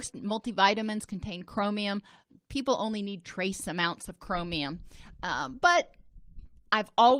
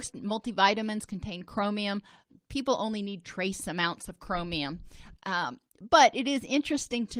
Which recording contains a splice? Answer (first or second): second